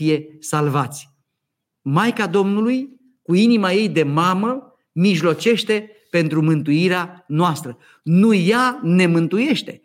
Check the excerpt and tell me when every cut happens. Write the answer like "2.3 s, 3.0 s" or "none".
none